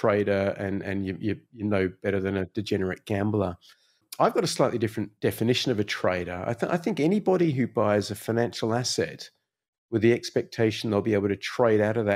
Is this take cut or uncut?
cut